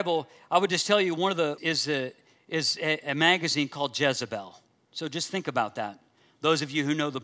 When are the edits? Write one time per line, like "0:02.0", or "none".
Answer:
0:01.6